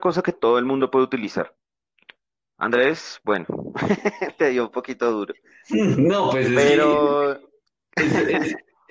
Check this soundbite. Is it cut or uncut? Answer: uncut